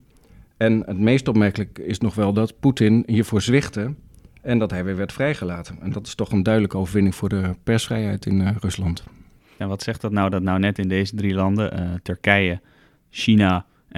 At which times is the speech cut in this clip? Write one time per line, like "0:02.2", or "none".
0:09.6